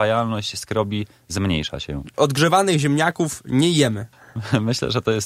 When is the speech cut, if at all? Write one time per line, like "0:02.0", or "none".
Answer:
none